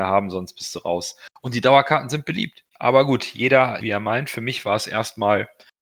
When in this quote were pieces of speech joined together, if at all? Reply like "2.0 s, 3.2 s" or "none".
2.7 s, 3.8 s